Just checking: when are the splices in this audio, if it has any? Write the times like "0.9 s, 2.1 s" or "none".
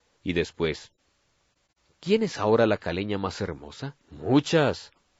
4.0 s

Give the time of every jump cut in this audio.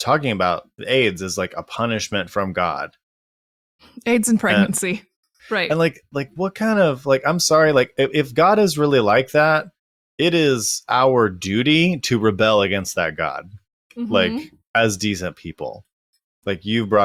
5.4 s

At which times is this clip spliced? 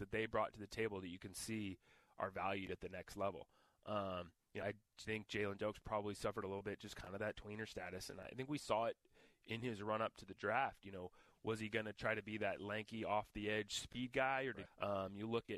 4.6 s, 14.7 s

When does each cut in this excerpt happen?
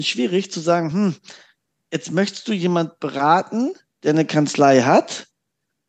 none

